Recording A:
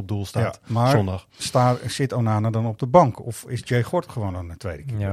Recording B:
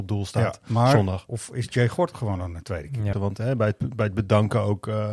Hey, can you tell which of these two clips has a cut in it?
B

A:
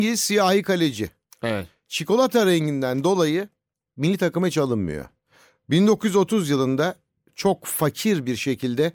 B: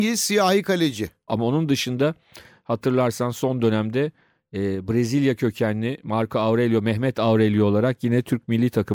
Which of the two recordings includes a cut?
B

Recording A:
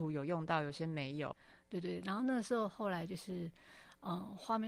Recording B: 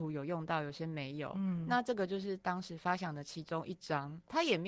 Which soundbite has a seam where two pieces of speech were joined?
A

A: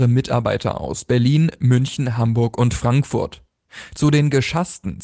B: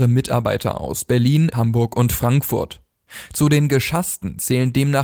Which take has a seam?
B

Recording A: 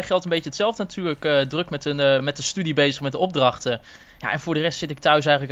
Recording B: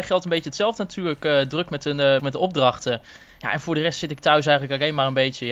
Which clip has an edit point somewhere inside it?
B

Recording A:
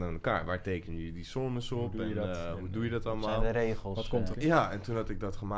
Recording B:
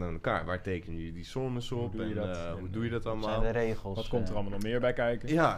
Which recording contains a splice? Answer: A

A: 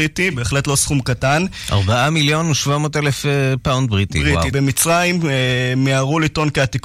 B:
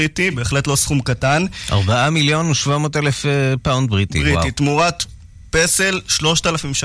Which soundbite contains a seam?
A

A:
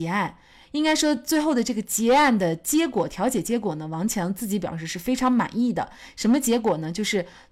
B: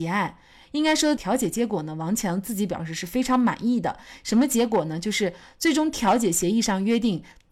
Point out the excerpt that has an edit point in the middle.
B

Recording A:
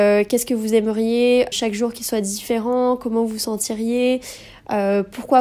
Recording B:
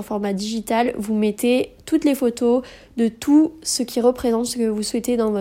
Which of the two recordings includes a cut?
A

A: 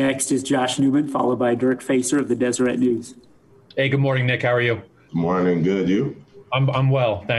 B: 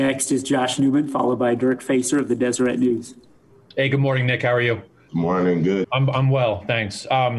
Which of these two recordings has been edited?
B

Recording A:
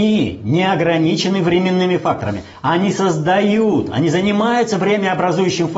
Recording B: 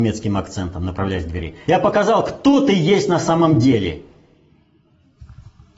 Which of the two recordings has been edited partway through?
B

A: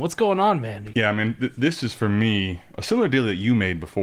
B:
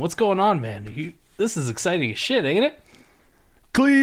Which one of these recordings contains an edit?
A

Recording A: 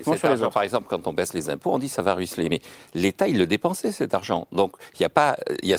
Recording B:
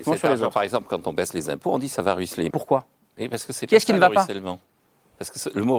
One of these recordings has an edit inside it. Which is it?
B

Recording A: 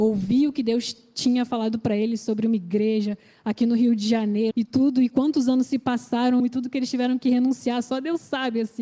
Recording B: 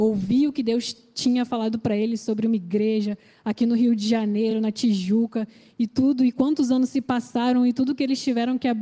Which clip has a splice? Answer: A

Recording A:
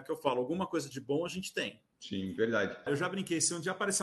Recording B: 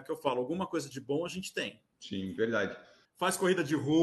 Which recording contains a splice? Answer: A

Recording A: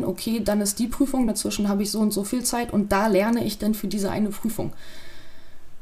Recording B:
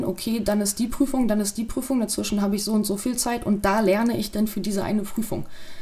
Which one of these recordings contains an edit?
A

